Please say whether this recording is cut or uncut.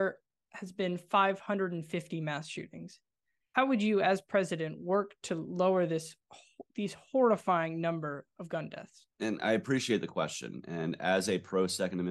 cut